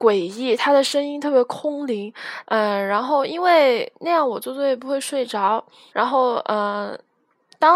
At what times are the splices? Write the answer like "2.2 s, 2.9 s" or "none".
2.4 s, 5.9 s